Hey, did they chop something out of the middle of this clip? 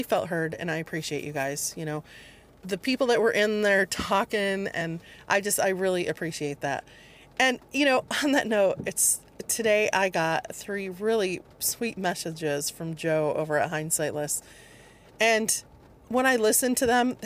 no; 0 cuts

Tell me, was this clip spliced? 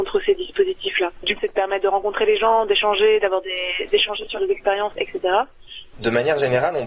yes; 2 cuts; at 1.4 s, 5.9 s

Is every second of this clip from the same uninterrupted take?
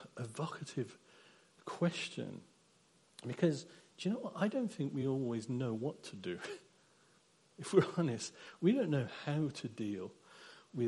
yes; 0 cuts

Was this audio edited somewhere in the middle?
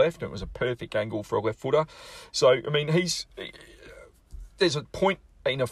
no; 0 cuts

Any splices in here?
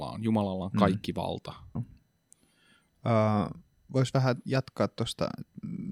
yes; 2 cuts; at 1.8 s, 3.9 s

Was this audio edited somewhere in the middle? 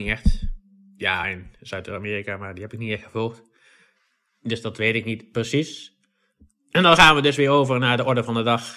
no; 0 cuts

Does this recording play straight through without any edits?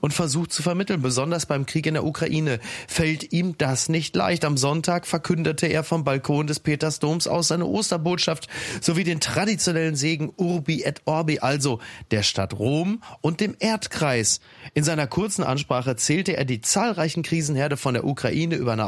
yes; 0 cuts

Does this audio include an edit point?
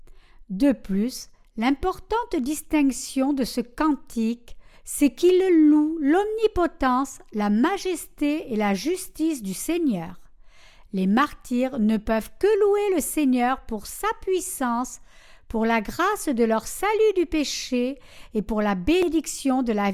no; 0 cuts

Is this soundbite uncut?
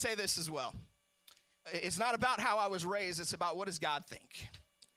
no; 1 cut; at 1.6 s

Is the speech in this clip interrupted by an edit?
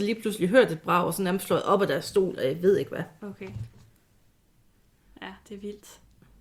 no; 0 cuts

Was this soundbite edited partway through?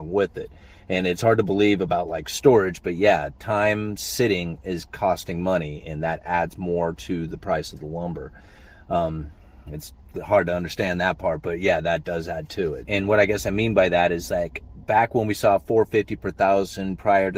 yes; 1 cut; at 12.9 s

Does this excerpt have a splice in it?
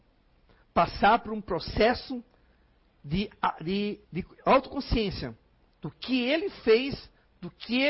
yes; 1 cut; at 4.0 s

